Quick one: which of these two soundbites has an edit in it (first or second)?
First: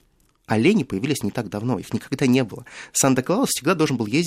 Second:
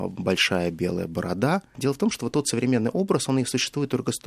second